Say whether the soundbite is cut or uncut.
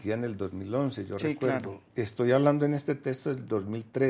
uncut